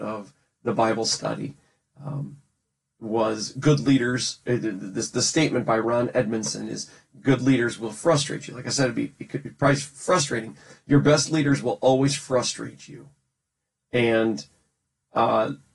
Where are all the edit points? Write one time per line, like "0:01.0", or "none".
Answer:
none